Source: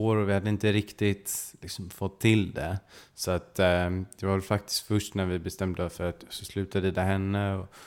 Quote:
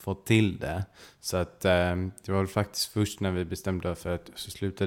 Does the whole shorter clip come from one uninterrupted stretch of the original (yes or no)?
yes